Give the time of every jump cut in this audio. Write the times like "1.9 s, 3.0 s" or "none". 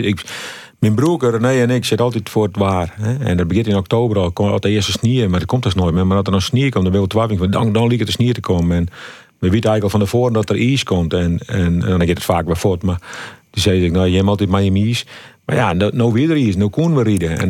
none